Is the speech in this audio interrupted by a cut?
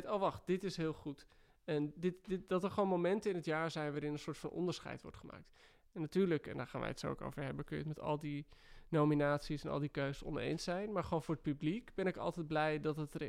no; 0 cuts

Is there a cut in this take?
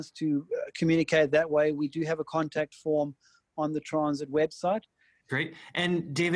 yes; 1 cut; at 5.2 s

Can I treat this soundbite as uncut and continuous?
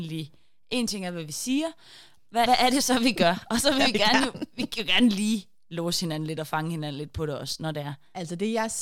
no; 1 cut; at 2.5 s

